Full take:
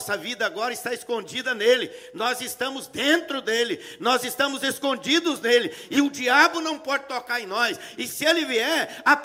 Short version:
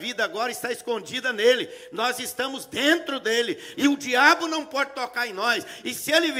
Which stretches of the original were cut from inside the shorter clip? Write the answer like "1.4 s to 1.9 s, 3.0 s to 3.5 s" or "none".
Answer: 4.0 s to 5.9 s